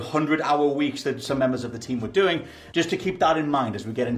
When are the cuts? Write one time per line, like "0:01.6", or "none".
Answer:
0:02.7